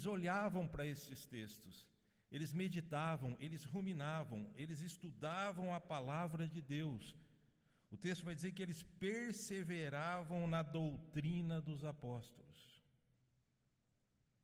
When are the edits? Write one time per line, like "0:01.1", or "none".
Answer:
none